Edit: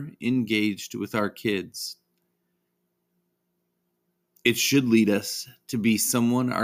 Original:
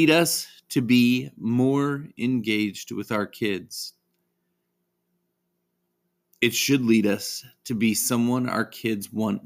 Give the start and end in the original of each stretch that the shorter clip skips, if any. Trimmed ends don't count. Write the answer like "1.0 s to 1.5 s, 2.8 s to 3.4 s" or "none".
none